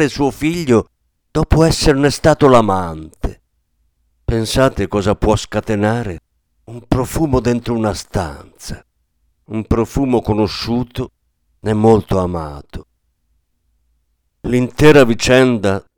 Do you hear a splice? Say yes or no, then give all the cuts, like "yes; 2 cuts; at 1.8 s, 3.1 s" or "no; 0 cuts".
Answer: no; 0 cuts